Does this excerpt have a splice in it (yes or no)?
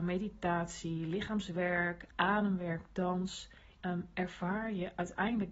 yes